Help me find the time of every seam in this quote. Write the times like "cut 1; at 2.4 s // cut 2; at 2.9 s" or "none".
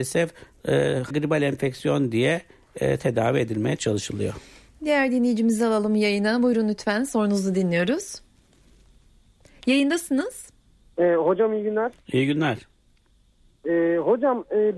cut 1; at 1.1 s